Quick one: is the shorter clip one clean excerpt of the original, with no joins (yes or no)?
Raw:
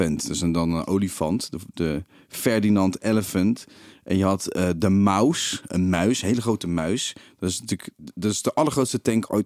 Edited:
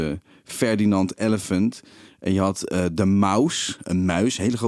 yes